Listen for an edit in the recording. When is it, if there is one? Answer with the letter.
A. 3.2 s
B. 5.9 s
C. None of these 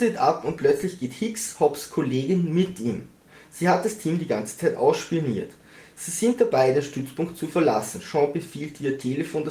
C